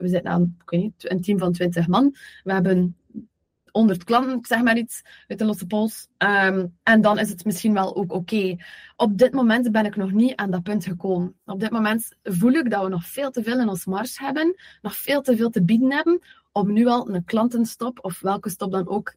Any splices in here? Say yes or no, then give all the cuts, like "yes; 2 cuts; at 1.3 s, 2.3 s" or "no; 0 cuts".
no; 0 cuts